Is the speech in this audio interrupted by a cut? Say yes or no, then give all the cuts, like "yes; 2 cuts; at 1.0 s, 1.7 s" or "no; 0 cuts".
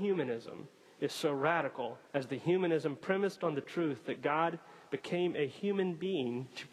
yes; 1 cut; at 2.1 s